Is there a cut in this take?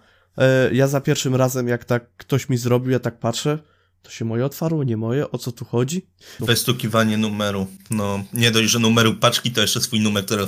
yes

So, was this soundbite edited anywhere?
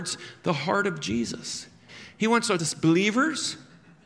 yes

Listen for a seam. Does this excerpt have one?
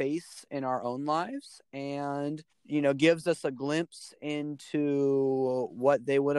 yes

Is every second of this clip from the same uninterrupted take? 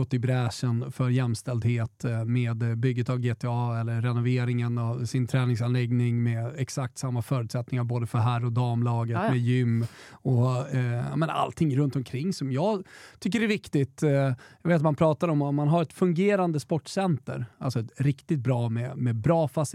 yes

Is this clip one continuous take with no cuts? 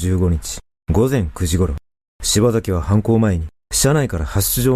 yes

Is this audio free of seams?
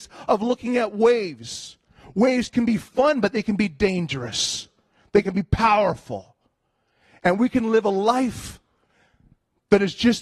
yes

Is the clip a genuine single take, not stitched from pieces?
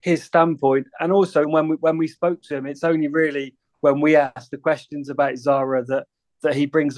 no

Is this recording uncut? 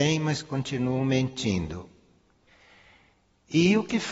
yes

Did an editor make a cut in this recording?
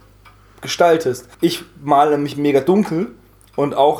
yes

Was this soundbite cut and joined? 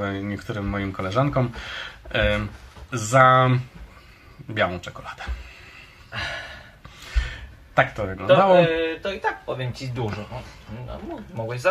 no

